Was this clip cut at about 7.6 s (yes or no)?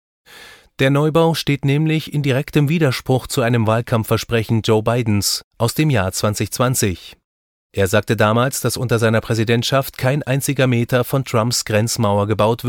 no